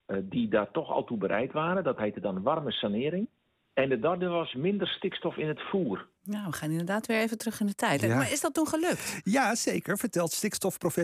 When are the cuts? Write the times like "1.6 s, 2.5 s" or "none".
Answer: none